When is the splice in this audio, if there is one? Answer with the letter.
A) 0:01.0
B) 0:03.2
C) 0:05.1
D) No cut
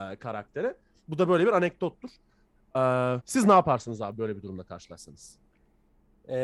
B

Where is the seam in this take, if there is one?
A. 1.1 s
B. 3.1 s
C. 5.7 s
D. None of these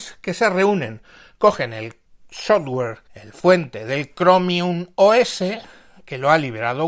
B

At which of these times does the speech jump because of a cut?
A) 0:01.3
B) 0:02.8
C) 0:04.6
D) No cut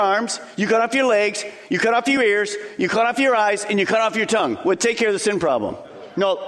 D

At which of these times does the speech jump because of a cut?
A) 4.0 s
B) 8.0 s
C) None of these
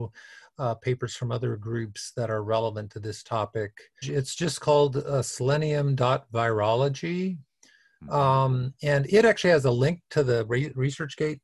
A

